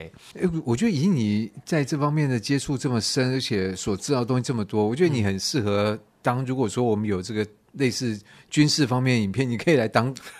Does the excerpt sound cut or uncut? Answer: uncut